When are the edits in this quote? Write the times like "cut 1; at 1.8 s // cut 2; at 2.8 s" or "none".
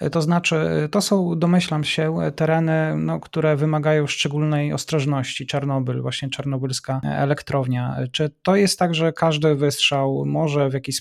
none